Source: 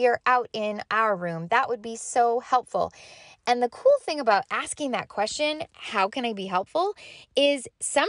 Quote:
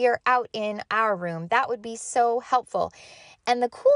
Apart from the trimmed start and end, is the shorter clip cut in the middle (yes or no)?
no